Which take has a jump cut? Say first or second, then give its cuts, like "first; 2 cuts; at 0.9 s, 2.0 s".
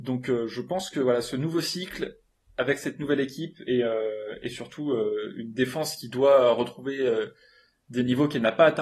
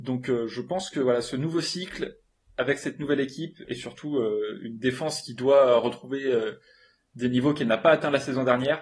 second; 1 cut; at 3.6 s